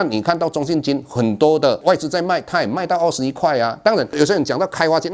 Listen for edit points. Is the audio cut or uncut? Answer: uncut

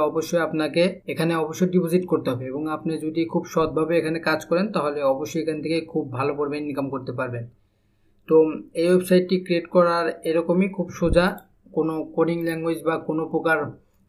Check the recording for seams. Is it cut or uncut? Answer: cut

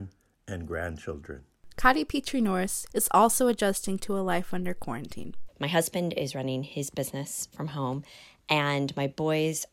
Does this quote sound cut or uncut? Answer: cut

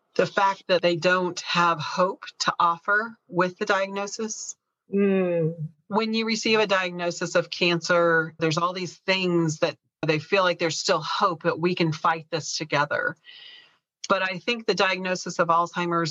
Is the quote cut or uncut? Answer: cut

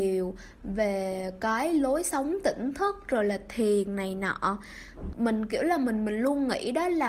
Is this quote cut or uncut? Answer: cut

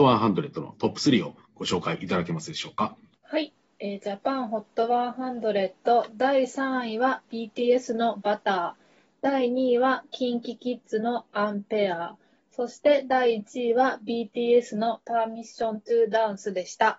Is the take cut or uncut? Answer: uncut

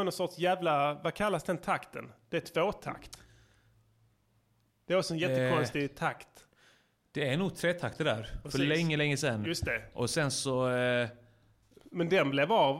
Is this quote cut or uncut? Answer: cut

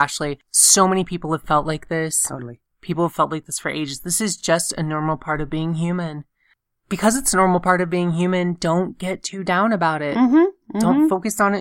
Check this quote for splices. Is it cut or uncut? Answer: uncut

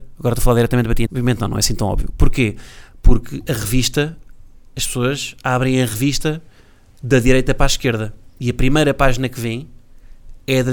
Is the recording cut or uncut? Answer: cut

